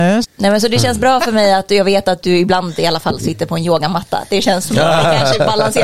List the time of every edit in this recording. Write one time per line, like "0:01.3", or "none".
none